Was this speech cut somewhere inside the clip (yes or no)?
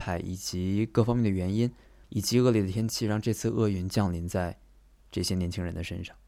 no